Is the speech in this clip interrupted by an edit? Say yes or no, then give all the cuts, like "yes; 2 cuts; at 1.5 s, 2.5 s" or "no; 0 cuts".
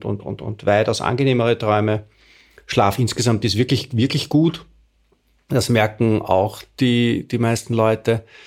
no; 0 cuts